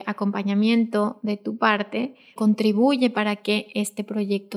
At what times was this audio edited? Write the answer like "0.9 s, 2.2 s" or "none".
2.4 s